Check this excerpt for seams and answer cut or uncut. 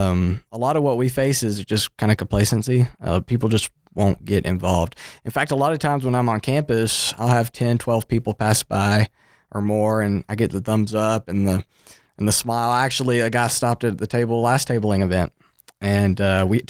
uncut